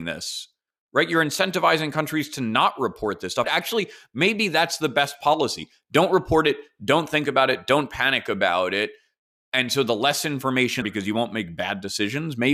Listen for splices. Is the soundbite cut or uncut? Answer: cut